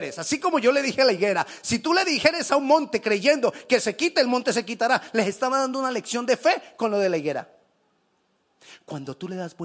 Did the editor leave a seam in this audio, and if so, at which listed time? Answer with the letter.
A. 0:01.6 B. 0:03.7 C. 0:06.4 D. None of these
D